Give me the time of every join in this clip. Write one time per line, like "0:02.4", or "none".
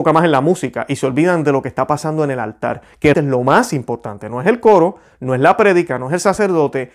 0:03.1